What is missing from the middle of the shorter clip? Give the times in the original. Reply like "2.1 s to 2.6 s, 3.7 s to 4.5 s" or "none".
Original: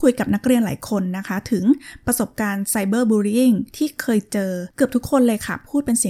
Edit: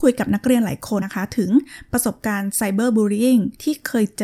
1.0 s to 1.2 s